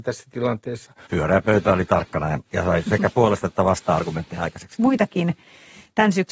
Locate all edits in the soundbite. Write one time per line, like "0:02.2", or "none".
0:01.1
0:04.7